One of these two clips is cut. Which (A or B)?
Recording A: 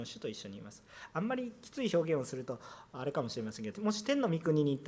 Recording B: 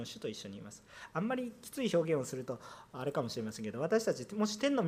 A